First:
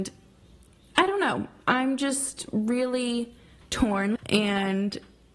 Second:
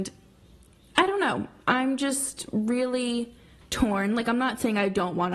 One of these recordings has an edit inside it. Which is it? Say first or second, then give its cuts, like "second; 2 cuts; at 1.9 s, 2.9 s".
first; 1 cut; at 4.2 s